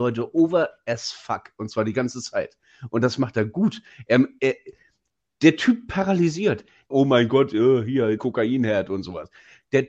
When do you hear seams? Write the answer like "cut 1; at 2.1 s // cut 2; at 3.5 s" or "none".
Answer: cut 1; at 6.9 s // cut 2; at 8.2 s